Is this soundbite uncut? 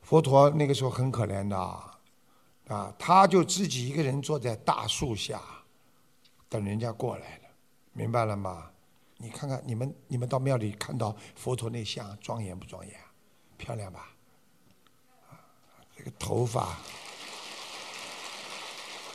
no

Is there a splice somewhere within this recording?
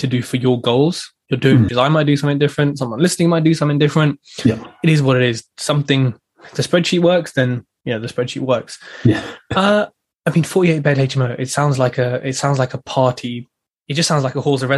yes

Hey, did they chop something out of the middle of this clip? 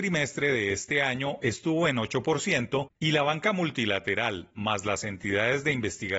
no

